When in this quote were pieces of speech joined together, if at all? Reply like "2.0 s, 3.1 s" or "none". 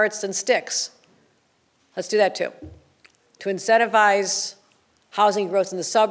none